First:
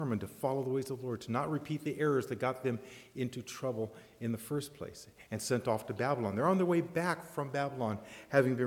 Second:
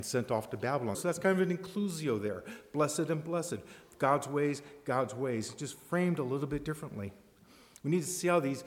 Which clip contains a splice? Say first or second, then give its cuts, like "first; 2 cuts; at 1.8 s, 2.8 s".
second; 1 cut; at 0.9 s